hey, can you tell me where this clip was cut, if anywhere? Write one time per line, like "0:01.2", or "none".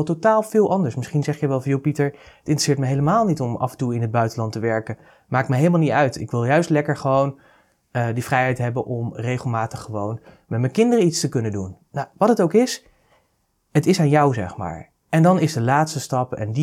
none